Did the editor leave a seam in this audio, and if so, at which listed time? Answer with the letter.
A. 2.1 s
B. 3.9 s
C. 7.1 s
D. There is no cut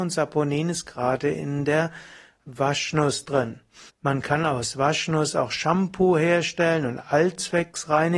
B